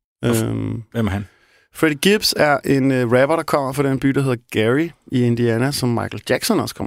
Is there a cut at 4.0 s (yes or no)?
no